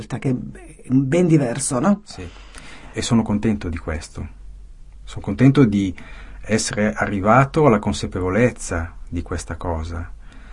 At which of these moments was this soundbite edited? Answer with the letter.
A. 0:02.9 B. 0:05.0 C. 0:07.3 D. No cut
A